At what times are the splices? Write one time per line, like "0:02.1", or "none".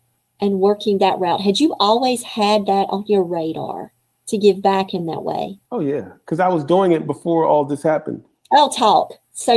0:05.6